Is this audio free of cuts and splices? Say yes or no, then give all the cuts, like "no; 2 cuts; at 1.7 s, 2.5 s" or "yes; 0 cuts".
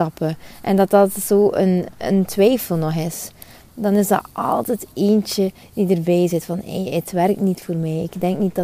yes; 0 cuts